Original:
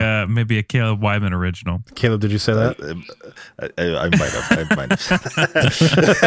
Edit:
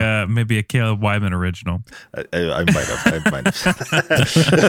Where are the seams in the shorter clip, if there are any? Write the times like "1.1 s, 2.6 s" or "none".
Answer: 1.9 s

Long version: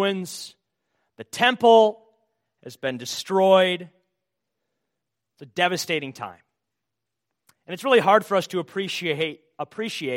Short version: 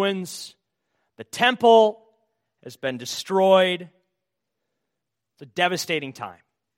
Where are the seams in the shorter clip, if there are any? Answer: none

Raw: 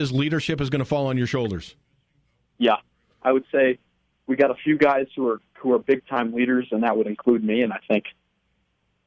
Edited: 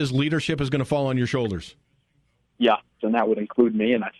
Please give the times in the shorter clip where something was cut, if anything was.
3.0 s

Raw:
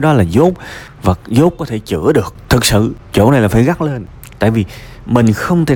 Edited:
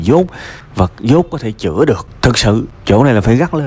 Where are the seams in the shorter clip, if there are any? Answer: none

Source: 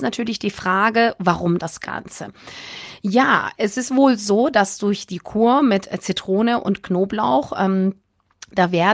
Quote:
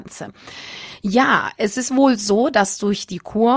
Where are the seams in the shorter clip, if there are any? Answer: none

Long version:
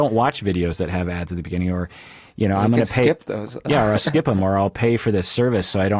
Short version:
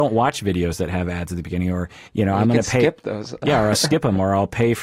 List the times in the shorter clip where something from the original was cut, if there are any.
2.1 s

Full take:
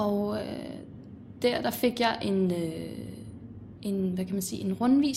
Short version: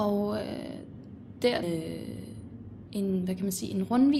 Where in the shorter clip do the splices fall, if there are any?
1.6 s

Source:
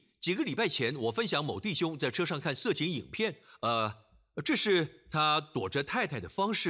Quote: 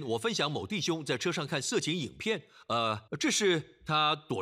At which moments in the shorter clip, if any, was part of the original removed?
3.1 s

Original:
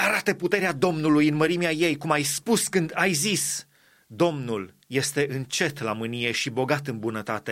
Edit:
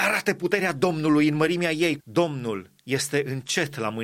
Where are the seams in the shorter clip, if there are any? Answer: 2.0 s

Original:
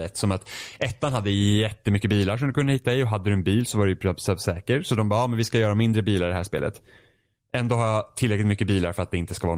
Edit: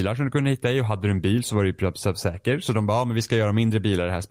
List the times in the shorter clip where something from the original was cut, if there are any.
none

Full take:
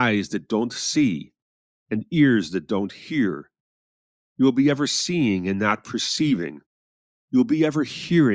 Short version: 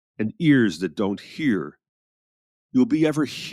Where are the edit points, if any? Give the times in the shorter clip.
2.5 s

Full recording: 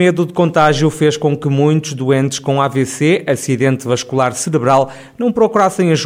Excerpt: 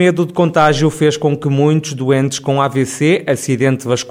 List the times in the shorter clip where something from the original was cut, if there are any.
none

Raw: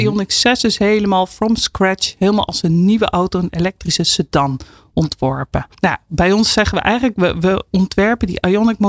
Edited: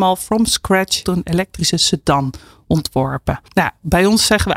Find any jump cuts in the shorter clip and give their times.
1.0 s

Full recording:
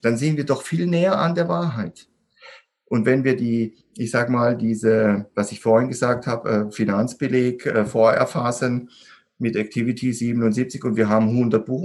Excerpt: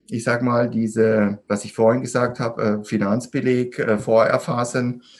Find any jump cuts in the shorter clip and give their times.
none

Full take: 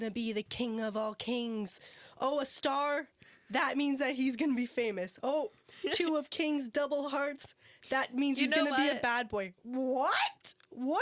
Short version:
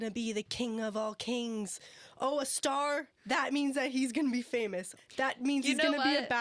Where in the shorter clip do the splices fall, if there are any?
3.2 s, 5.0 s

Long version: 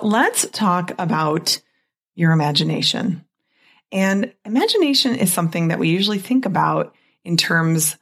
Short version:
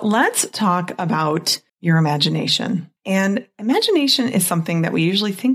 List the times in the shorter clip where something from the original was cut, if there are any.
1.7 s, 3.0 s

